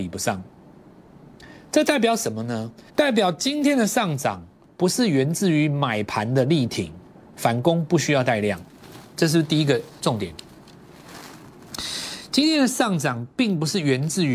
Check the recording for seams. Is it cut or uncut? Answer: cut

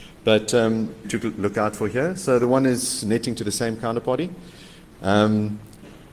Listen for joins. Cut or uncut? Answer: cut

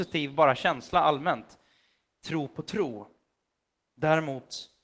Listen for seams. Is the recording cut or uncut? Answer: uncut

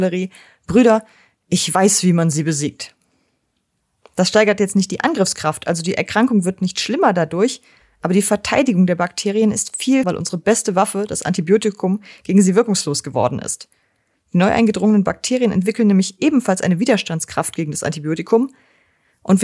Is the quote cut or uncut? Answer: cut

